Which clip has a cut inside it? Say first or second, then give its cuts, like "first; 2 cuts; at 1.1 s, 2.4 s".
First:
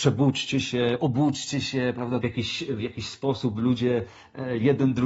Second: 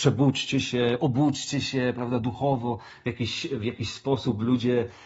first; 1 cut; at 2.2 s